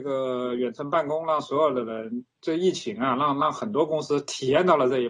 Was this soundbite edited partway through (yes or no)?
no